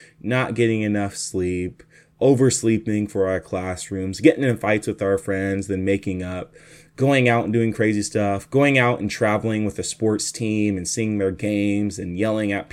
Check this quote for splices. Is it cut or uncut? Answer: uncut